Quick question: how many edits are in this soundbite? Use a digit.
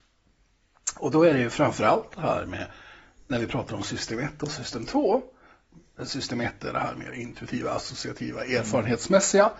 0